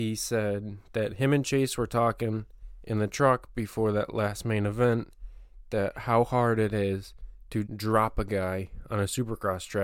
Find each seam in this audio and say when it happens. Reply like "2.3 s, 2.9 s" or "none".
7.7 s